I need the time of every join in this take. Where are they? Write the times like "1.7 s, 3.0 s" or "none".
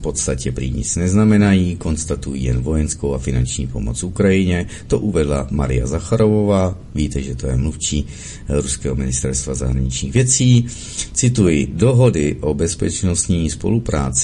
none